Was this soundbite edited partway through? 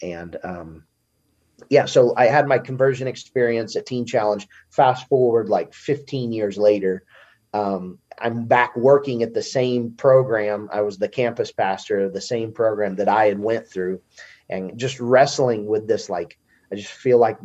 yes; 1 cut; at 8.1 s

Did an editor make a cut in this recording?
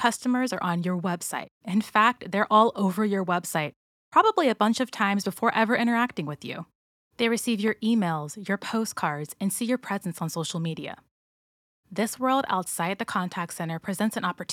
no; 0 cuts

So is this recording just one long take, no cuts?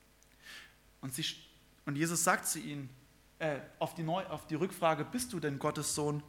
yes; 0 cuts

